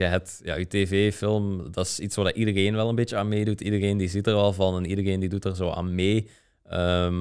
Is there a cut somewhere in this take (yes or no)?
no